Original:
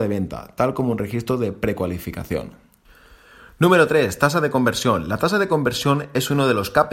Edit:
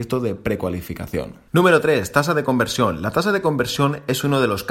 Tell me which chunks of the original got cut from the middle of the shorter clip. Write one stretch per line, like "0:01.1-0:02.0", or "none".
0:02.6-0:03.5